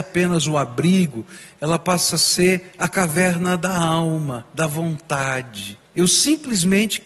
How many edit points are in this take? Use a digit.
1